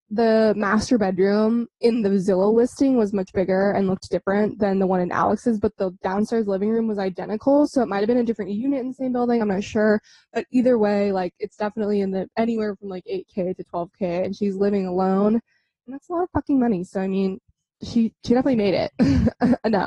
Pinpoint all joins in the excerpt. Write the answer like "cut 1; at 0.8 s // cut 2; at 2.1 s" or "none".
none